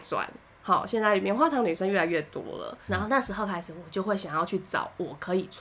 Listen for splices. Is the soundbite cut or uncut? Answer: cut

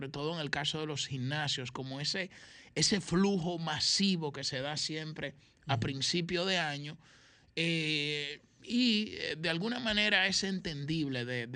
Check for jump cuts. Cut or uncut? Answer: uncut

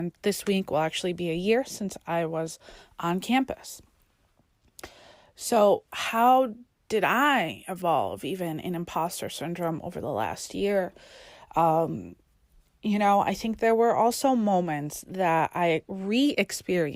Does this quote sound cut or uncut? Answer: cut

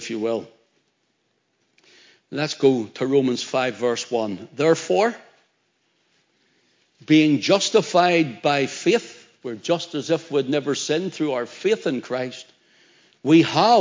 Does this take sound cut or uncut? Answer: uncut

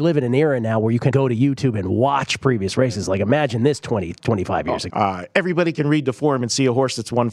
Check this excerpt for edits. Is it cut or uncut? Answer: cut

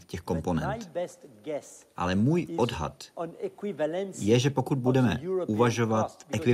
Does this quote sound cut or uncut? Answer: uncut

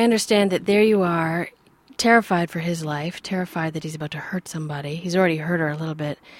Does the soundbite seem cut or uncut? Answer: uncut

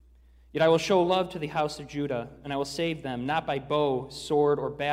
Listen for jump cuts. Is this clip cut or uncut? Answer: uncut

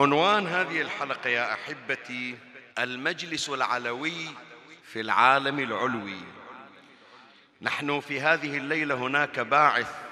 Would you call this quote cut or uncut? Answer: cut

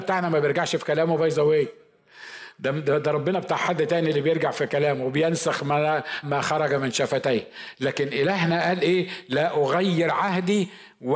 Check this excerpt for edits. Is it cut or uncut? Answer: cut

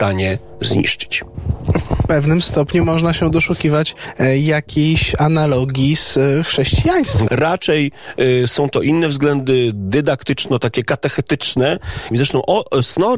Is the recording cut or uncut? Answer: cut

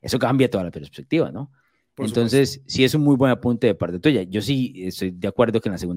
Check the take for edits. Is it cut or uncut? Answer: uncut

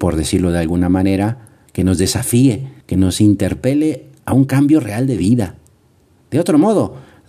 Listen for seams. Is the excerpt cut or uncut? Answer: cut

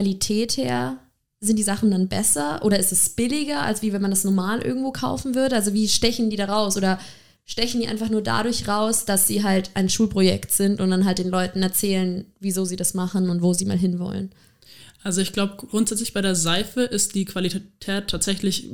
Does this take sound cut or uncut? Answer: uncut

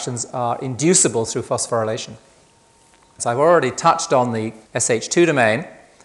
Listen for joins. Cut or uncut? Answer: cut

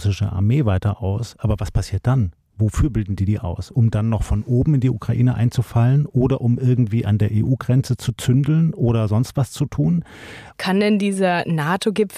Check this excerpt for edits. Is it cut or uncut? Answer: cut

